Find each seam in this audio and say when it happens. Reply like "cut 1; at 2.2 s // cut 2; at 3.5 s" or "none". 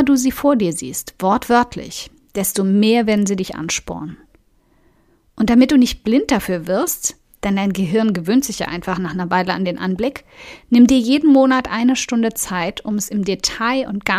none